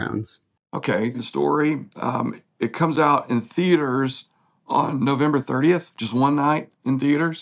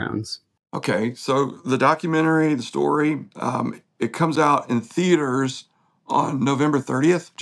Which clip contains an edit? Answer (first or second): first